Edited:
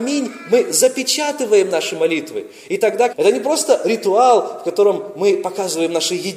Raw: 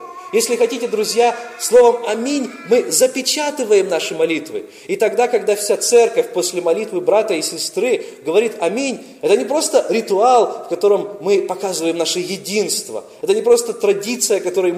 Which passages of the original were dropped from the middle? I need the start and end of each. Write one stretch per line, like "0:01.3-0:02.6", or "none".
0:05.3-0:09.2